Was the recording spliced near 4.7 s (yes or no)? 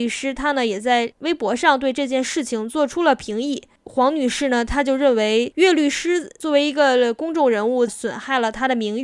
no